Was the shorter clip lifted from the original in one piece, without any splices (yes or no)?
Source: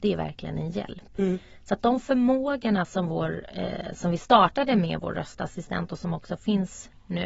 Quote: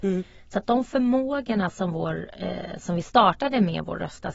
yes